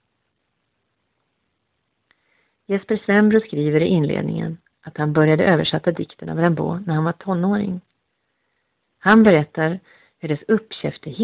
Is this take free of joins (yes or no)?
yes